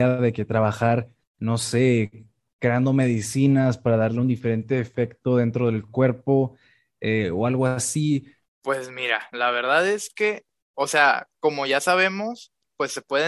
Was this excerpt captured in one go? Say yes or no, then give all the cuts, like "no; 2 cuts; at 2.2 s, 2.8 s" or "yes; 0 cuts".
no; 2 cuts; at 8.5 s, 11.3 s